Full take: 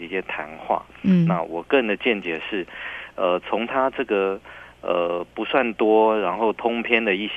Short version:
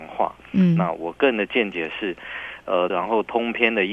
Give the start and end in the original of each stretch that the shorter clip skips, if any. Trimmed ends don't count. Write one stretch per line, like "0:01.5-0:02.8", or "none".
0:03.4-0:06.2